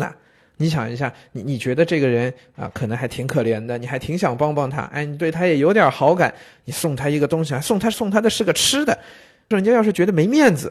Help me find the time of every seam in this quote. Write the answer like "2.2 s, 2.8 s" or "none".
7.9 s, 9.5 s